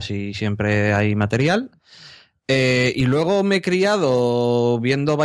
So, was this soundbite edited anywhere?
no; 0 cuts

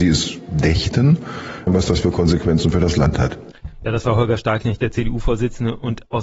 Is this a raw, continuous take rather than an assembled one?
no; 1 cut; at 1.7 s

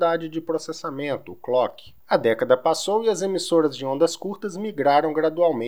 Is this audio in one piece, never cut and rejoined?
no; 1 cut; at 2.0 s

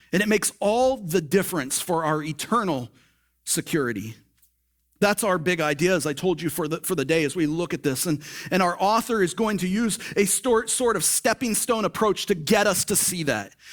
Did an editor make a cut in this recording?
no; 0 cuts

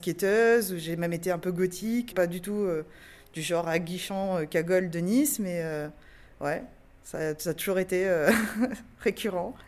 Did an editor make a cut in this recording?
yes; 1 cut; at 2.1 s

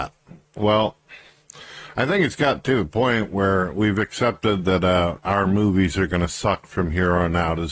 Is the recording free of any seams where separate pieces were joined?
yes; 0 cuts

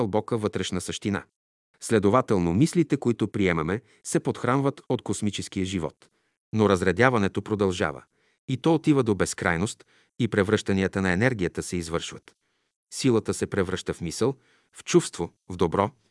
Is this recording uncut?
yes; 0 cuts

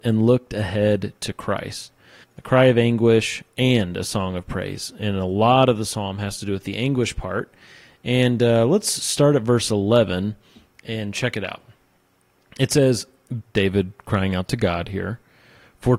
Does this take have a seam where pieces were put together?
yes; 2 cuts; at 2.2 s, 13.4 s

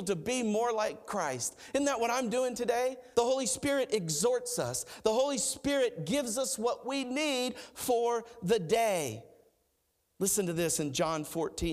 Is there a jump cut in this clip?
yes; 2 cuts; at 3.1 s, 5.0 s

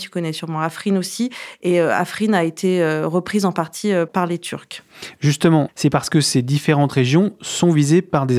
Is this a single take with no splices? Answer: no; 1 cut; at 5.7 s

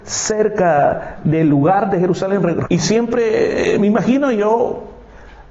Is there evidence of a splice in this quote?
yes; 1 cut; at 2.6 s

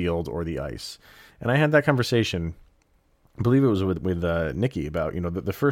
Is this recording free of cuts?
yes; 0 cuts

